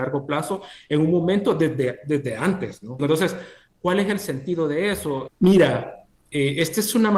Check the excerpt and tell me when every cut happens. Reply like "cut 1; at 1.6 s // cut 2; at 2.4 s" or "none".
cut 1; at 3.0 s // cut 2; at 5.3 s